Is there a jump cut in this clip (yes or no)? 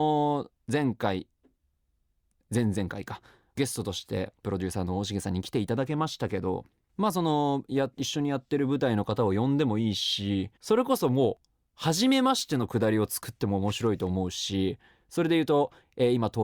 yes